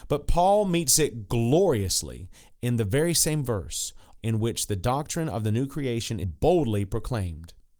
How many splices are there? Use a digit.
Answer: 2